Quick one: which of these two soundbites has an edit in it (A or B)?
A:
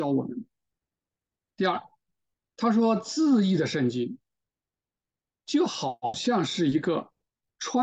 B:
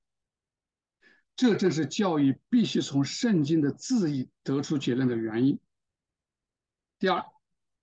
A